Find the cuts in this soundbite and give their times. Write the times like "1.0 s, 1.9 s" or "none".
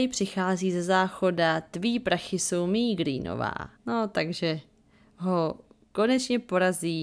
3.8 s